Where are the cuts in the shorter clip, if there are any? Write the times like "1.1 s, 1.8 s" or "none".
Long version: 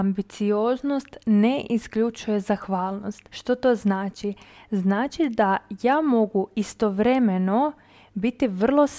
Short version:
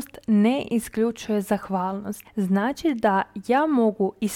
2.2 s